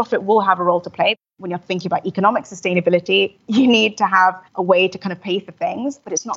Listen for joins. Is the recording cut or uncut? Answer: cut